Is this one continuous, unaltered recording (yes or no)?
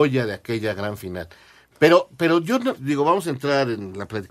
no